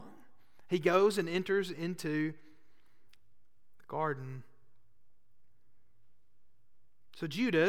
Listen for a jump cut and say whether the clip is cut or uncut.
uncut